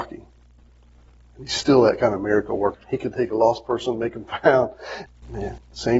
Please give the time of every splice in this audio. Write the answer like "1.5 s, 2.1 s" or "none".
2.7 s, 5.1 s